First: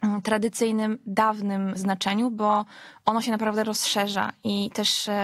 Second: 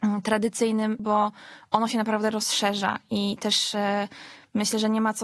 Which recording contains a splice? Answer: second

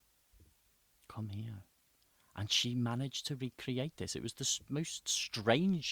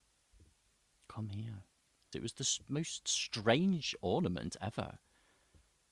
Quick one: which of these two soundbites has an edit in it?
second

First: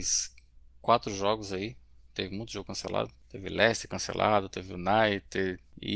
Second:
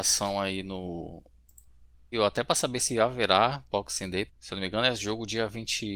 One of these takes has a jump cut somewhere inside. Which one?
second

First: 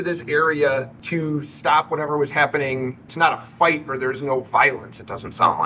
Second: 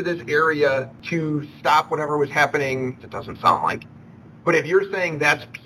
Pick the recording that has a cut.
second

